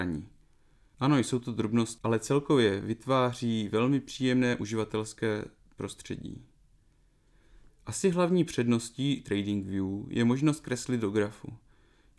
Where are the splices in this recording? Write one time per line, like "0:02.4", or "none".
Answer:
0:00.9
0:07.7